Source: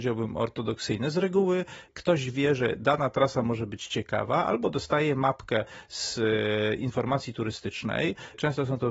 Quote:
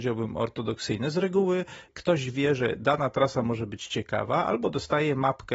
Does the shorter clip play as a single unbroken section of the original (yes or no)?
yes